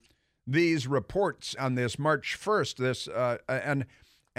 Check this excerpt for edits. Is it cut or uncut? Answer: cut